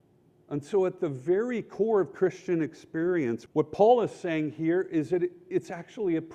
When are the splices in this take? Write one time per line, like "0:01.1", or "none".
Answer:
0:03.5

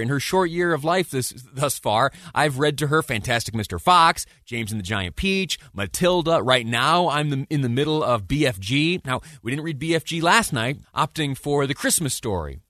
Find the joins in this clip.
0:10.8

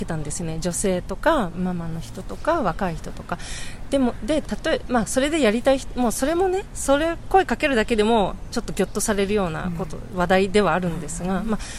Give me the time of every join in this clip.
0:01.5

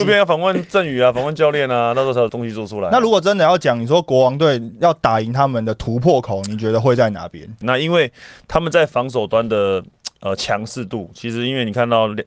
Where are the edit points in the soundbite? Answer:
0:02.3
0:07.6

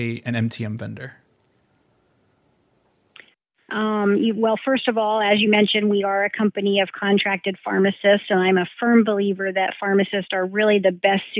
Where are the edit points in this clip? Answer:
0:03.7

